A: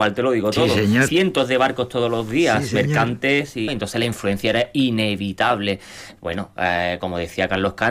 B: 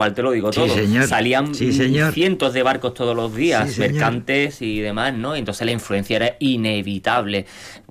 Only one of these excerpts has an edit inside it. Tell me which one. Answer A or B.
A